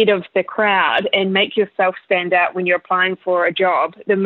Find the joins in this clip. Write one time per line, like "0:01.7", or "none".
none